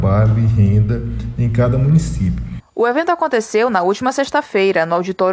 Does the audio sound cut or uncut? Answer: cut